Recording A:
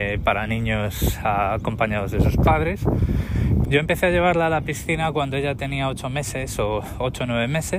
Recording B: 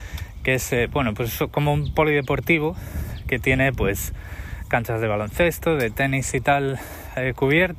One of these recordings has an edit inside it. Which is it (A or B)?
A